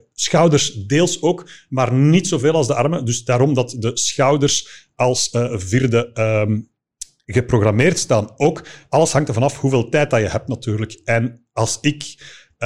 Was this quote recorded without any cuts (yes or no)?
yes